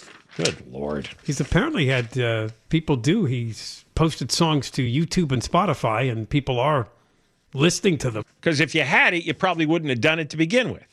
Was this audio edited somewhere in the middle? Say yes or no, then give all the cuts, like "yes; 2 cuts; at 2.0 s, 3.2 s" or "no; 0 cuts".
yes; 1 cut; at 8.2 s